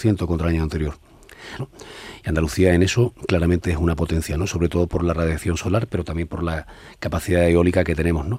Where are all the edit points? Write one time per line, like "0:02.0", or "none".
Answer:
0:01.6